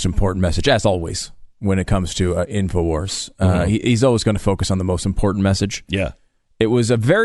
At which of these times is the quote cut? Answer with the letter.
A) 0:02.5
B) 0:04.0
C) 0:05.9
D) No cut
D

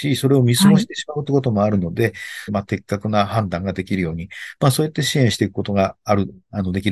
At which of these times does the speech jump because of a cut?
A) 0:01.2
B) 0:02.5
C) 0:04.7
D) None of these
B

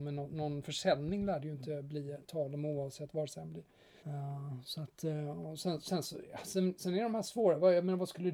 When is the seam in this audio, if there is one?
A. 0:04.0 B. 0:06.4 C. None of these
A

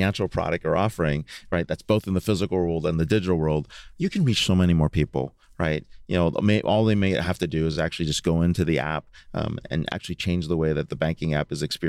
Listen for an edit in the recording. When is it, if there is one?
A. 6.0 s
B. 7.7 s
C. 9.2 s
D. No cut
D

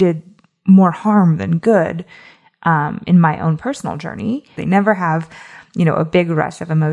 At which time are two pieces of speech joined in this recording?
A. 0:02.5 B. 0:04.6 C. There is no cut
B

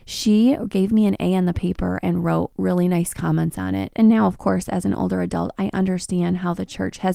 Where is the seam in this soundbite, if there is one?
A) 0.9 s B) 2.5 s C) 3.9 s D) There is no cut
C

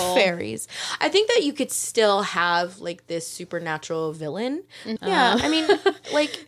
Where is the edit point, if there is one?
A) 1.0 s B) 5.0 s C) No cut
B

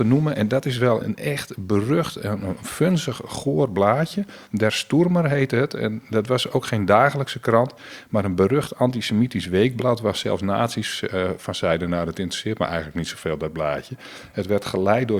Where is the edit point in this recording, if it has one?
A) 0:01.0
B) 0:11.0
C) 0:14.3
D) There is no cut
A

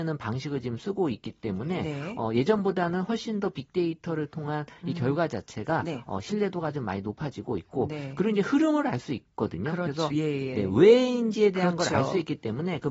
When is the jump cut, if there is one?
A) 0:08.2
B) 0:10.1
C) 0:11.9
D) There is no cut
B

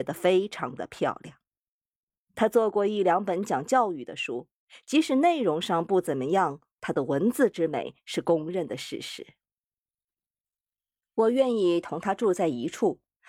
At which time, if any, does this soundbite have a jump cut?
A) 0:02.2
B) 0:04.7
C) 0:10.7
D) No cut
D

